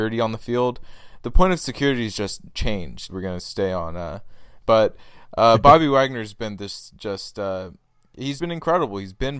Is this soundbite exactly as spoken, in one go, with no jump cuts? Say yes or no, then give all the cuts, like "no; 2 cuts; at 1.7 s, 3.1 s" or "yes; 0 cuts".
no; 3 cuts; at 3.1 s, 4.6 s, 8.4 s